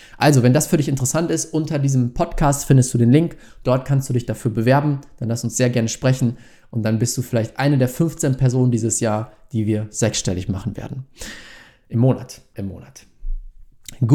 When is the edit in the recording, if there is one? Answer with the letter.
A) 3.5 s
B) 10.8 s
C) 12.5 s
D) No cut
C